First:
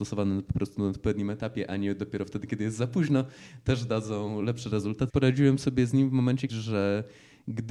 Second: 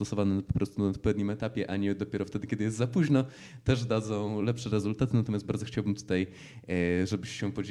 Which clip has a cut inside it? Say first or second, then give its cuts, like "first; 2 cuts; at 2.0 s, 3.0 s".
first; 2 cuts; at 5.1 s, 6.5 s